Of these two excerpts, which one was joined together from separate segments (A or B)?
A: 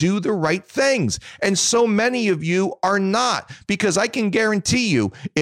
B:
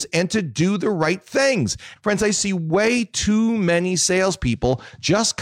B